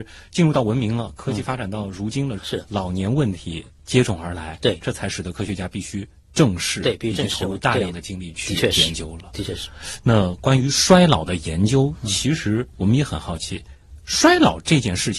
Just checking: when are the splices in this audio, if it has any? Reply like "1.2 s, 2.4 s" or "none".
2.4 s